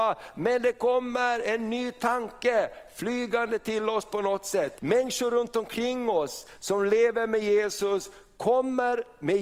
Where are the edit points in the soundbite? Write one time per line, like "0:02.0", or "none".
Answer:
0:04.8